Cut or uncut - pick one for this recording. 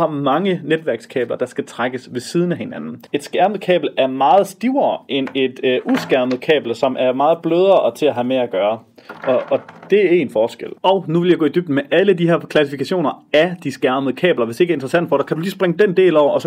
cut